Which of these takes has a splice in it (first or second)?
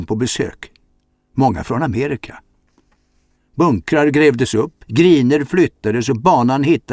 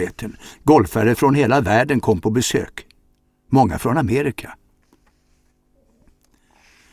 first